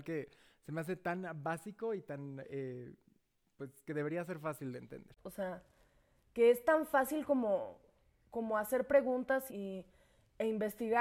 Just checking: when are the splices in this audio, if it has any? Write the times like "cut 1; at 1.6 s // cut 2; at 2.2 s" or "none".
cut 1; at 5.2 s // cut 2; at 9.5 s

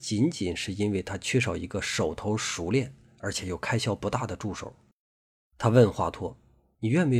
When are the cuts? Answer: none

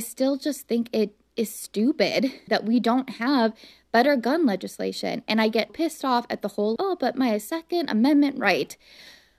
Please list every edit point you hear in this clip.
cut 1; at 2.5 s // cut 2; at 5.7 s // cut 3; at 6.8 s

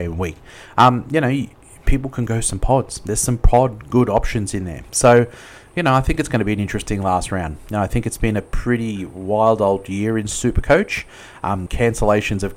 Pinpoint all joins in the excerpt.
cut 1; at 4.9 s // cut 2; at 11.7 s

